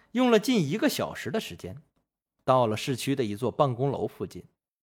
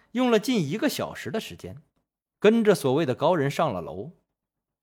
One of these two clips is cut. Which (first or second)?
second